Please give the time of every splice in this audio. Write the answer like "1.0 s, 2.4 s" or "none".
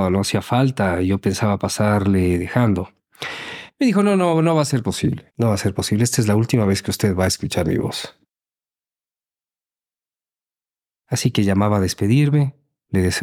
5.3 s